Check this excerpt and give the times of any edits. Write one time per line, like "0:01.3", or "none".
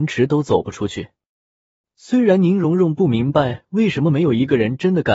none